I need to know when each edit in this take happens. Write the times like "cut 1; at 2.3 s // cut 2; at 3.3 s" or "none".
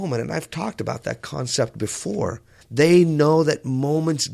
cut 1; at 2.6 s

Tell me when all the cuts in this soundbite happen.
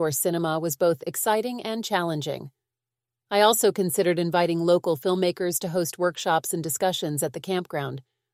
cut 1; at 3.2 s

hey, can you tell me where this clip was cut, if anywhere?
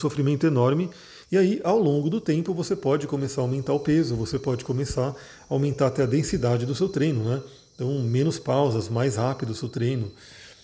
cut 1; at 1.2 s

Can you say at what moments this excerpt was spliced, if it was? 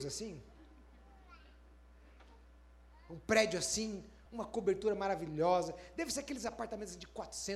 cut 1; at 4.3 s

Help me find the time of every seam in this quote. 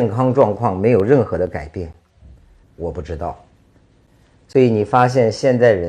cut 1; at 2.6 s

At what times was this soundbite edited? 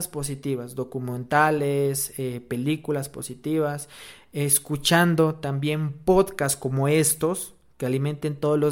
none

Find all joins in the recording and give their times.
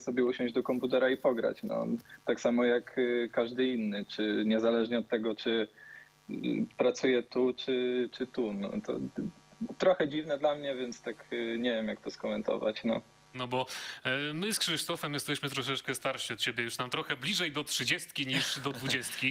cut 1; at 13.3 s

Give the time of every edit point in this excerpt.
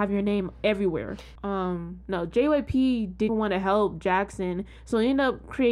cut 1; at 1.4 s // cut 2; at 3.3 s

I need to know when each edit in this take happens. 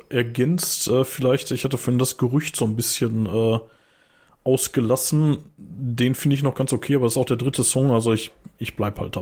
none

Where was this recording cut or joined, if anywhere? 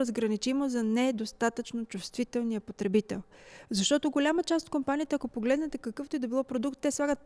none

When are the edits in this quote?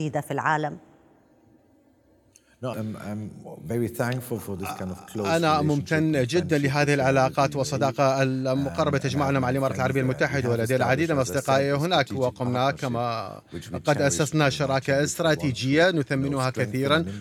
cut 1; at 2.7 s

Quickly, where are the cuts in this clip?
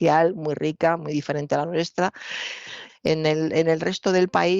cut 1; at 2.9 s

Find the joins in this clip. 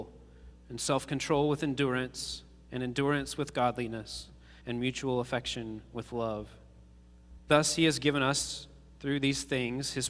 cut 1; at 4.6 s // cut 2; at 7.4 s

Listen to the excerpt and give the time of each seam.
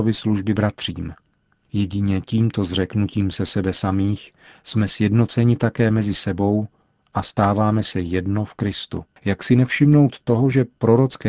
cut 1; at 4.5 s // cut 2; at 9.2 s

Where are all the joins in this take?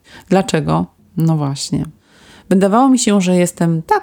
cut 1; at 1.0 s

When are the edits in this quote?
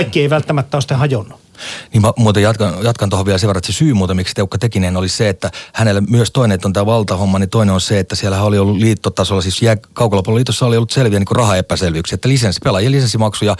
none

